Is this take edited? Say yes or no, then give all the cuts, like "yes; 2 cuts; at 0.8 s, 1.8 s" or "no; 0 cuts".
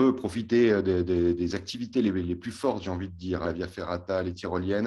yes; 1 cut; at 3.4 s